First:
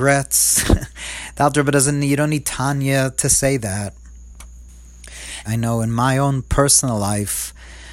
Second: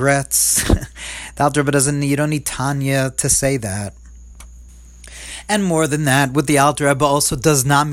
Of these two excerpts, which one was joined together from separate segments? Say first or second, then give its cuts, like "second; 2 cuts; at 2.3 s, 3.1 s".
first; 1 cut; at 5.4 s